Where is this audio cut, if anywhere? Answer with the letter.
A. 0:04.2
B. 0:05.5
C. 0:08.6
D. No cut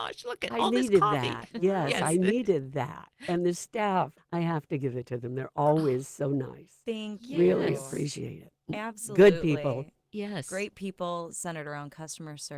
A